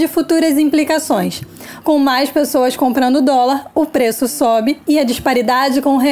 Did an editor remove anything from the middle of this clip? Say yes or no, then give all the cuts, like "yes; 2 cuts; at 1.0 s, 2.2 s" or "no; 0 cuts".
yes; 1 cut; at 1.8 s